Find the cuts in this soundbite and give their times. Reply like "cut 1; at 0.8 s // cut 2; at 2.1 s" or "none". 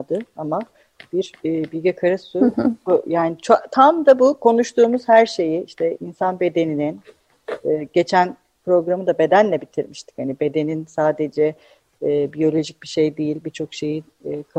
none

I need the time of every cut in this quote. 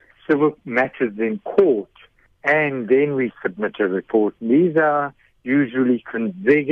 none

